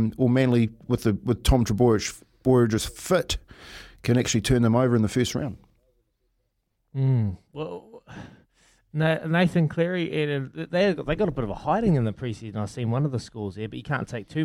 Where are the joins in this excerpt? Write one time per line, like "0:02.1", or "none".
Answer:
none

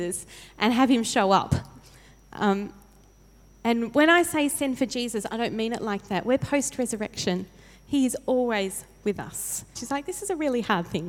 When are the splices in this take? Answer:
0:09.8

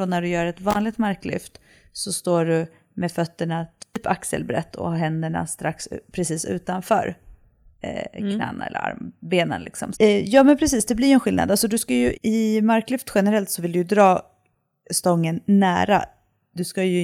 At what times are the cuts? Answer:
0:09.9
0:12.1

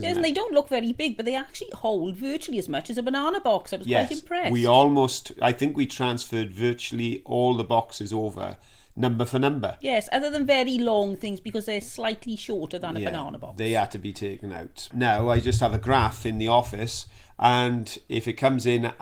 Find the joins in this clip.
0:14.9

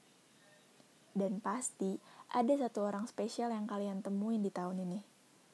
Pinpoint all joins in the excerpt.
none

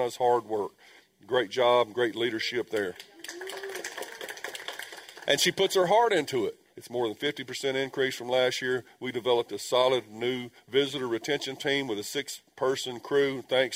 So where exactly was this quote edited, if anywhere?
0:06.7

